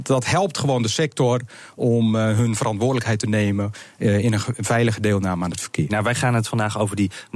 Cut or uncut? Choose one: cut